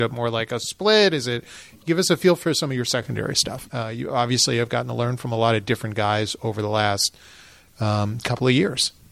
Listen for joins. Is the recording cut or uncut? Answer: cut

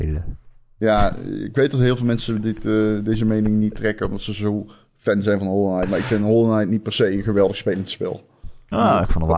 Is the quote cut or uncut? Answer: uncut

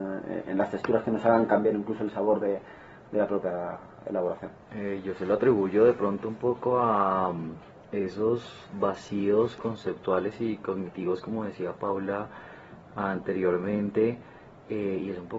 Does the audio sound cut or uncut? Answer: cut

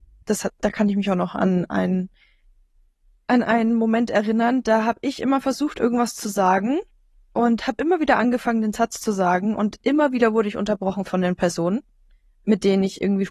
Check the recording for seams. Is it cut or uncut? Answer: uncut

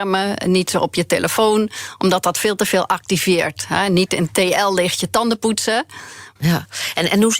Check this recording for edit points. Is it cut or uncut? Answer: cut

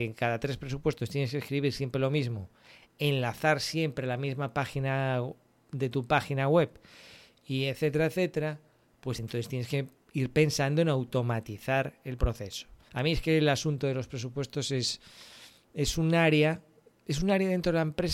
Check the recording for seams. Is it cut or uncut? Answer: uncut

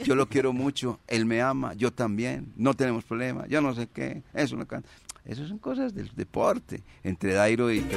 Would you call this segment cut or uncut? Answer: uncut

